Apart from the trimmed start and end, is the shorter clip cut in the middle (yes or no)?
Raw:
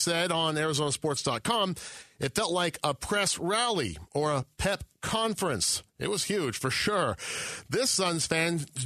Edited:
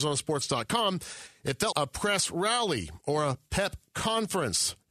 yes